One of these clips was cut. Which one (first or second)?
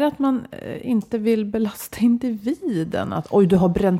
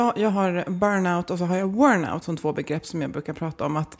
second